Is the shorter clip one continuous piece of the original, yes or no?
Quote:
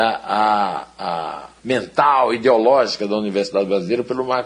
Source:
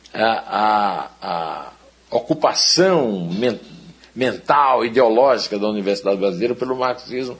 no